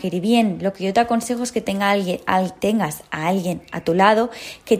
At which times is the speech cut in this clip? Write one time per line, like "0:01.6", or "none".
none